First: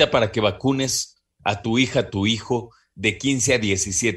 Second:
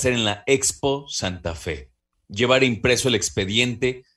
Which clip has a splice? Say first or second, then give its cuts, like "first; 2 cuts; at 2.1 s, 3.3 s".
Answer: second; 1 cut; at 2.2 s